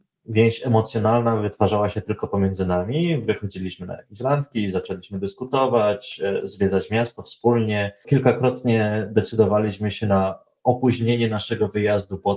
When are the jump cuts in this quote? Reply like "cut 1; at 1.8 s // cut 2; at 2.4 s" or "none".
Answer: none